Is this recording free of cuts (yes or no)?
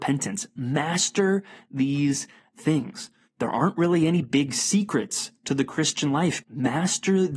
no